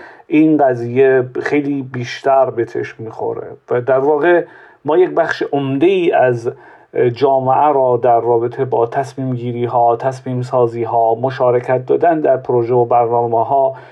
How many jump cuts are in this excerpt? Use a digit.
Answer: 0